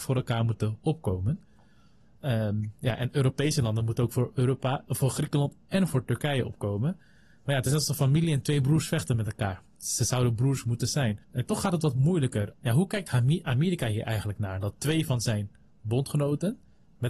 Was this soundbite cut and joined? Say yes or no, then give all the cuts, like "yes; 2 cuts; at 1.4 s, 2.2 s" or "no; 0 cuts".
yes; 2 cuts; at 11.2 s, 12.5 s